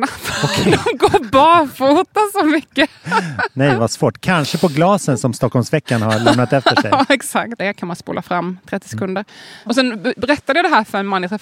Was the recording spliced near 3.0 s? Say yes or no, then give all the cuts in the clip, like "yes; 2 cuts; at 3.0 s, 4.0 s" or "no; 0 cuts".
yes; 3 cuts; at 3.0 s, 7.6 s, 9.7 s